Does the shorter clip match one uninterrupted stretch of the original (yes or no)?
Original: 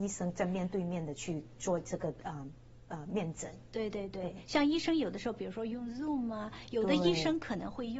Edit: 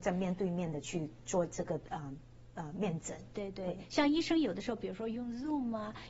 no